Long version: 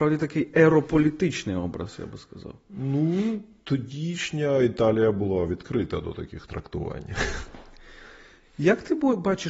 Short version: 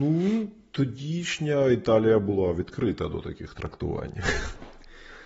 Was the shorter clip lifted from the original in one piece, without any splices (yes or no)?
yes